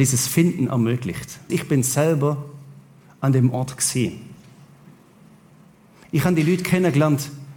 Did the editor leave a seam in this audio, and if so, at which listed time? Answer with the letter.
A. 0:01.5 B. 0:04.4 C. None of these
A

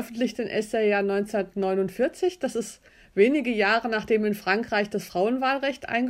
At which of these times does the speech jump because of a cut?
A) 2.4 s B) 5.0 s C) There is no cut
C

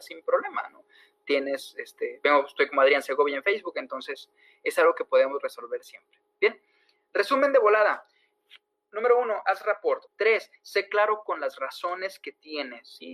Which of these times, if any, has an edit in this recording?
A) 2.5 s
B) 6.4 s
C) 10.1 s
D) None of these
C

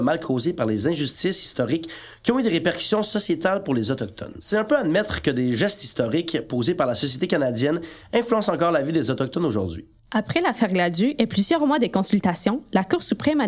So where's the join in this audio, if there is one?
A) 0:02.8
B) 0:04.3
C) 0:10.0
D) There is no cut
D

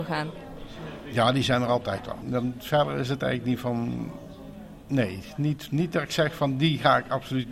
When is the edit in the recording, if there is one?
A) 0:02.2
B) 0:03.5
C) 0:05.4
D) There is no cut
A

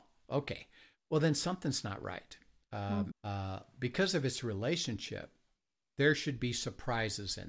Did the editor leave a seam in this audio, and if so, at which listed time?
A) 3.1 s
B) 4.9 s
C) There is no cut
A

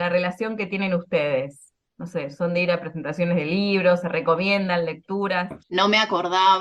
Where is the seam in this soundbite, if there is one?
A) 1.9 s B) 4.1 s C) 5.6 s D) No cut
C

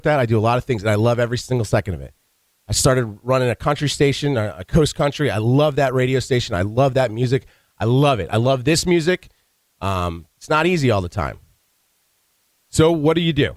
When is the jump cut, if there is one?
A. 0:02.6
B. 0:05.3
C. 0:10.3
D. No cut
C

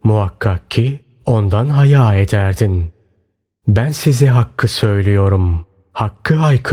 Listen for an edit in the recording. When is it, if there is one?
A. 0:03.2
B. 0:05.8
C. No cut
C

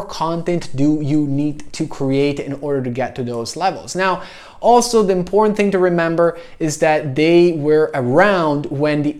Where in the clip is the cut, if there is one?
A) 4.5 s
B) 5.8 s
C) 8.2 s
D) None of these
D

